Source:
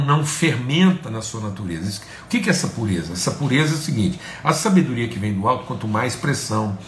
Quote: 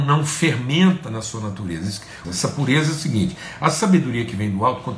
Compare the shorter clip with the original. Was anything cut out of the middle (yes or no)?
yes